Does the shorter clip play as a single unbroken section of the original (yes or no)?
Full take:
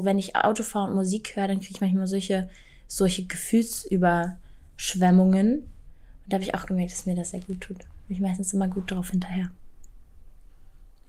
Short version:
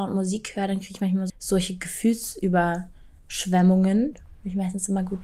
no